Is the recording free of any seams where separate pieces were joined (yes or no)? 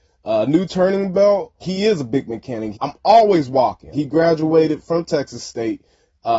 no